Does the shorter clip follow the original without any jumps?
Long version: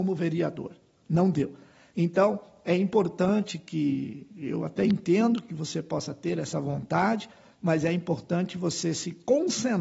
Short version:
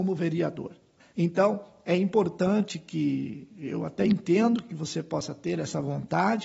no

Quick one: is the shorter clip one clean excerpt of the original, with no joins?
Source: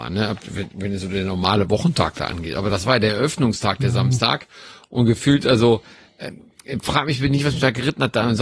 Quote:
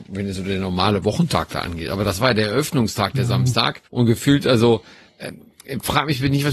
no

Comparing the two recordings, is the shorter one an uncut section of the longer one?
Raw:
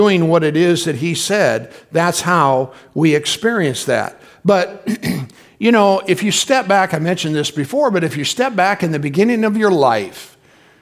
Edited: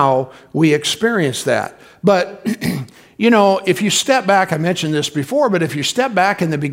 yes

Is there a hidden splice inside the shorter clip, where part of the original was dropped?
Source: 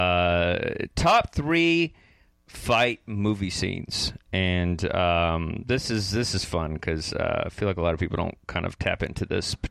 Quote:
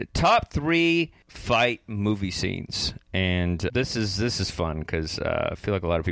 yes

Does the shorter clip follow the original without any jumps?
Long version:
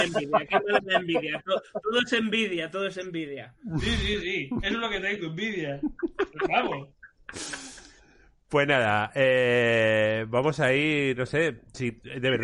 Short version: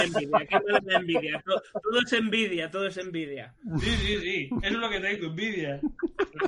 yes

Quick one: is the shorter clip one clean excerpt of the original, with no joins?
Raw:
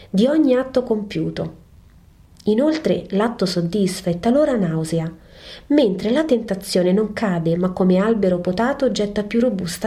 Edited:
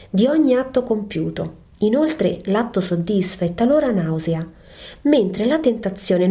no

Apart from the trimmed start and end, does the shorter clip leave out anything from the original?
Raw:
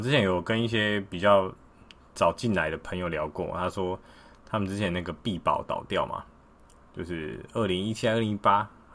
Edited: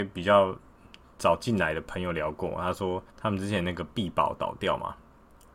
yes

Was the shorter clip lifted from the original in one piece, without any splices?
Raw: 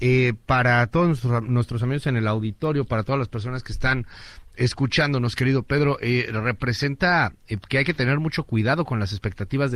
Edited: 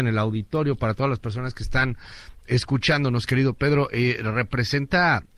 yes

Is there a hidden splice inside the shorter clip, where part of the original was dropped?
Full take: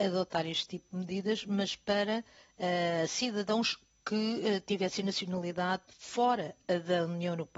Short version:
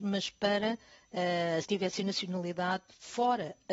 yes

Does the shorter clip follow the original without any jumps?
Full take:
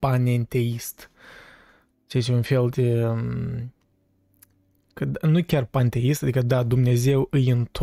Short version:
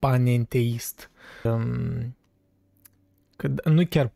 no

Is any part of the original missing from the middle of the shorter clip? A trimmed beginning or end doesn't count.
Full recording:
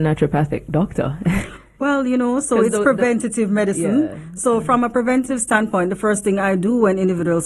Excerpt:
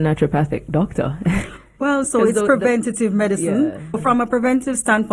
yes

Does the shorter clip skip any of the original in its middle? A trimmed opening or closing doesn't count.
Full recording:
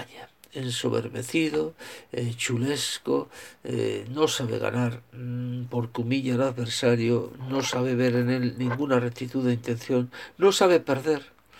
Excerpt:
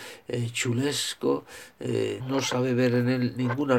yes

